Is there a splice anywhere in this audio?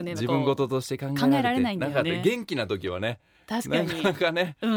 no; 0 cuts

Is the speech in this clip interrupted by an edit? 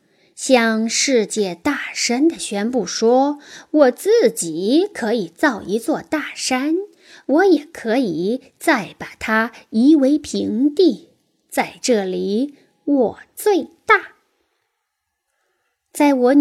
no; 0 cuts

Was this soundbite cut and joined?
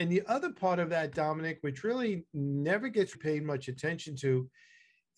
yes; 1 cut; at 3.1 s

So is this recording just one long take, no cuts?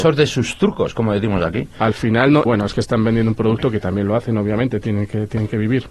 no; 1 cut; at 2.4 s

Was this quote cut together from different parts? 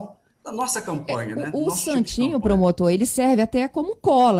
no; 0 cuts

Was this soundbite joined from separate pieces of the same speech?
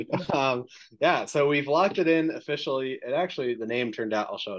no; 0 cuts

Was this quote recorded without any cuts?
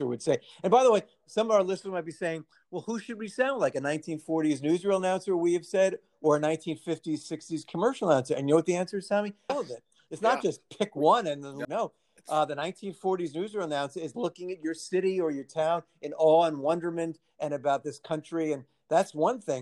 no; 2 cuts; at 9.5 s, 11.6 s

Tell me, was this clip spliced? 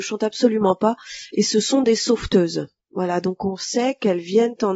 no; 0 cuts

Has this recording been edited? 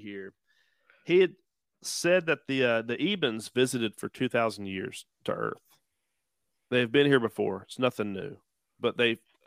no; 0 cuts

